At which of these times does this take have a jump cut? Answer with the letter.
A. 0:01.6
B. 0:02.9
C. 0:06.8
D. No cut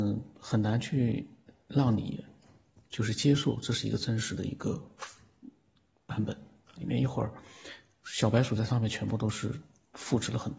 C